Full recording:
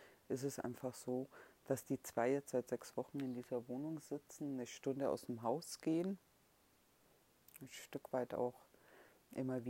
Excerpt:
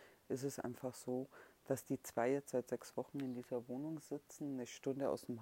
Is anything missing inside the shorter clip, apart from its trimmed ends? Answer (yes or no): no